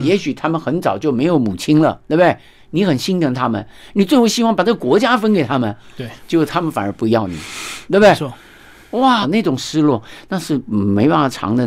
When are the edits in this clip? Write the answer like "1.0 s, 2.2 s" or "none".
9.2 s